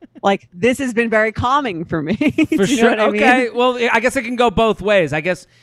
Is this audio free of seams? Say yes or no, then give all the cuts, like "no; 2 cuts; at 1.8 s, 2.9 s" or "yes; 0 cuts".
yes; 0 cuts